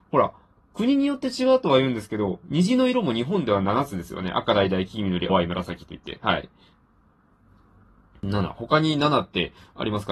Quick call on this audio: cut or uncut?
cut